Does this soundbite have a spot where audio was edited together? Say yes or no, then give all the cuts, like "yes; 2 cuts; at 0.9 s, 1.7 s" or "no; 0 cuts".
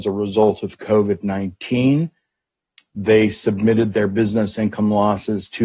no; 0 cuts